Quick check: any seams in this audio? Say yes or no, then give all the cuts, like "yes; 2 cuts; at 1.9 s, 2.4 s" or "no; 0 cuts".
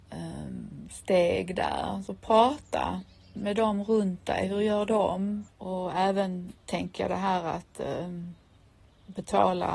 yes; 1 cut; at 5.5 s